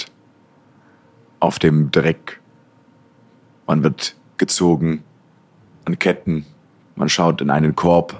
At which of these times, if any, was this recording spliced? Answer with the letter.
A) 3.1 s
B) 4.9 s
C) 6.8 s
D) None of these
C